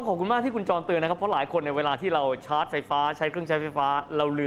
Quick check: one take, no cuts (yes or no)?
yes